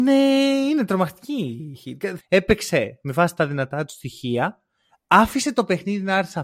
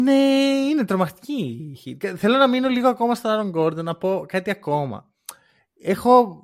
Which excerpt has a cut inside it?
first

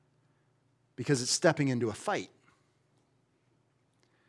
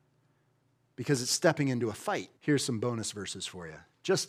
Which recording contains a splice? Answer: second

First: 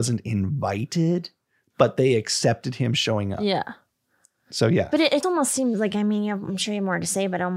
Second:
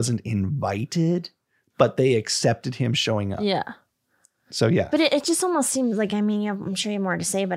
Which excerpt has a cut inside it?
first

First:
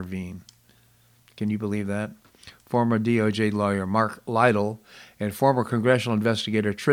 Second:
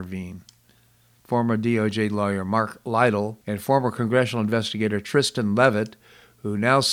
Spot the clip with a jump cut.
second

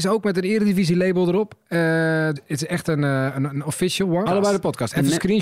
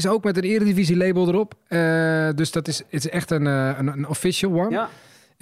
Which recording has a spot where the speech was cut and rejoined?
first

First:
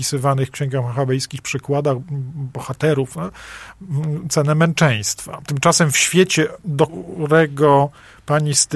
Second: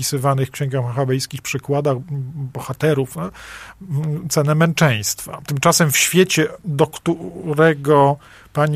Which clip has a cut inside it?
first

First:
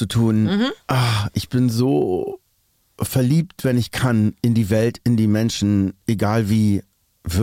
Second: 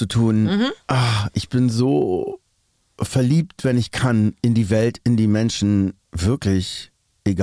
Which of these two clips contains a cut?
second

